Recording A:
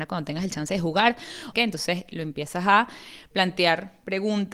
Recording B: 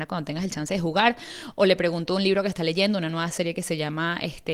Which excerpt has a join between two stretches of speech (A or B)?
A